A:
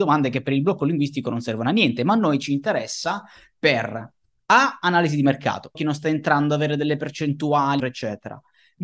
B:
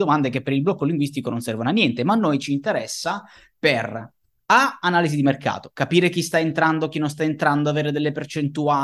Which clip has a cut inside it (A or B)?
A